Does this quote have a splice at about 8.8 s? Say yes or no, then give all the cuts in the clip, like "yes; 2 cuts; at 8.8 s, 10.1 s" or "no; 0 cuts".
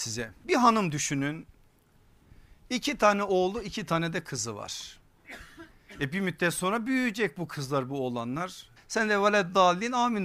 yes; 1 cut; at 8.8 s